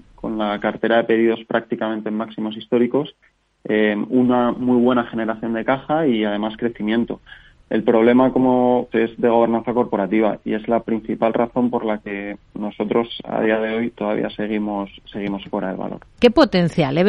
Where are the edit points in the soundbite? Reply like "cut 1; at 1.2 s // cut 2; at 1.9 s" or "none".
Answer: cut 1; at 8.9 s // cut 2; at 16.2 s